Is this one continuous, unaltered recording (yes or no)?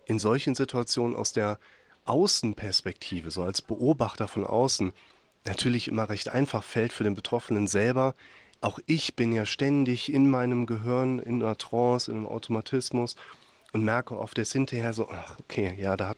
yes